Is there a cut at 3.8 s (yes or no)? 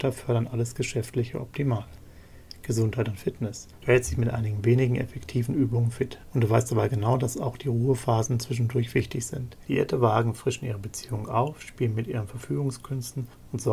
yes